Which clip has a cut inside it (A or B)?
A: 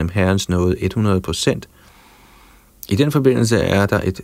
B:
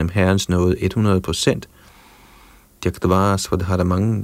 B